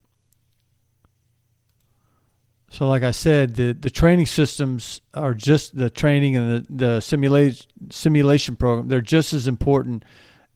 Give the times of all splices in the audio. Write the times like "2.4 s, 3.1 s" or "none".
none